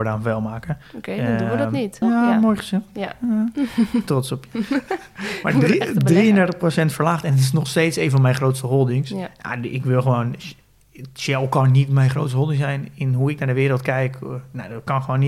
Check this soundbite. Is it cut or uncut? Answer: cut